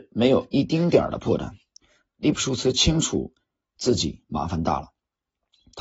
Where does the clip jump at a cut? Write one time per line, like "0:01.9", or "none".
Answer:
none